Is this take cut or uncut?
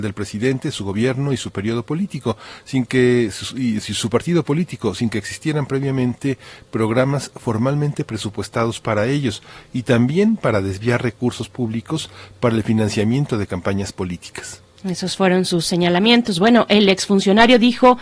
uncut